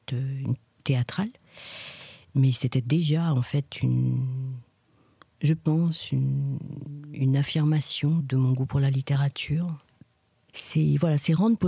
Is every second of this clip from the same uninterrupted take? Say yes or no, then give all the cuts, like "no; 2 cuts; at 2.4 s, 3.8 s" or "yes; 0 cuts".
no; 2 cuts; at 8.2 s, 10.5 s